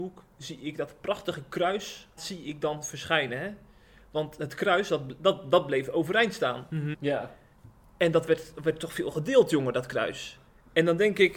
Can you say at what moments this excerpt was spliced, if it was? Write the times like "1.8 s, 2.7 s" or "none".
2.2 s, 6.9 s